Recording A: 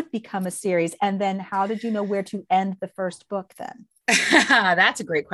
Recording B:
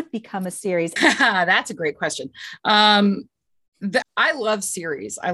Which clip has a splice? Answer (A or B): B